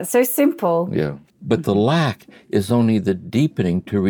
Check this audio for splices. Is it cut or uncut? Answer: cut